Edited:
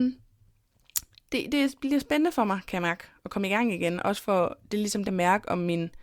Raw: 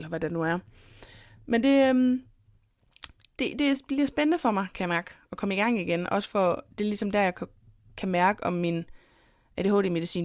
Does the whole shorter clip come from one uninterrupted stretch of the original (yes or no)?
no